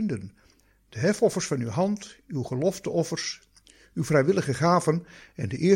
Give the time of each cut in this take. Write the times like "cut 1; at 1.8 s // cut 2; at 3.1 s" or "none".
none